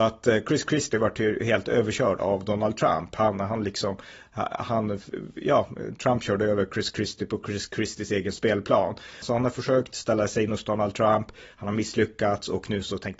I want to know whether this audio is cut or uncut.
cut